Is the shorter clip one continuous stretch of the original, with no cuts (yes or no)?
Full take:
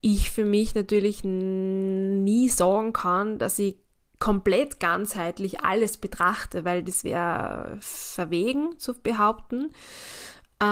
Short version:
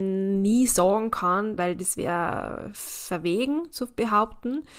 no